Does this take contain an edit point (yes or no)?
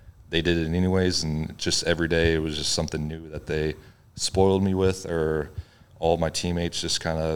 no